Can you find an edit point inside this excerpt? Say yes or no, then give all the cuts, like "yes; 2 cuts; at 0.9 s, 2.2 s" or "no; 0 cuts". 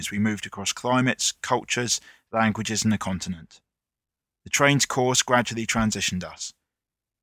no; 0 cuts